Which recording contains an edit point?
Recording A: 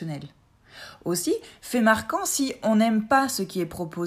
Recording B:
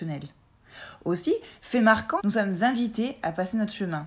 B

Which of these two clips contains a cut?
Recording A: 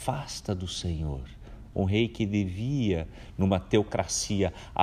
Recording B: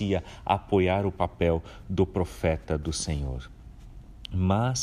A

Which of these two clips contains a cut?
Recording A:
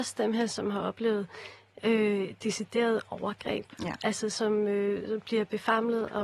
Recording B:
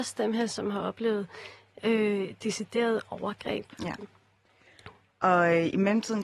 B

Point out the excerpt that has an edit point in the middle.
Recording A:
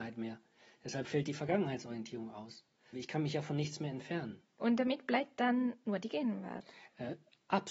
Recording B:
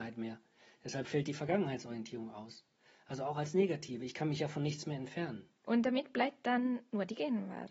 A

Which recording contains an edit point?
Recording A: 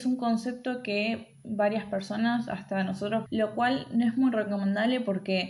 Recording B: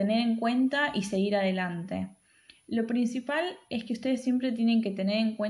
A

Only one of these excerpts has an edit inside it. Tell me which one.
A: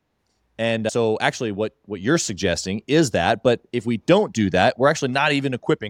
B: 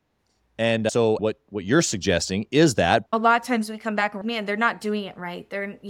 B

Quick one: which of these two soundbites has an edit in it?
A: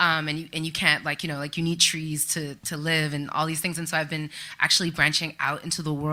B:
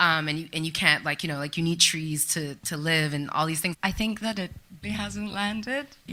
B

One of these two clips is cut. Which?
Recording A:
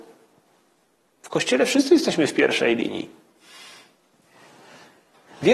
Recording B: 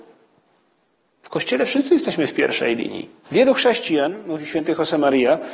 B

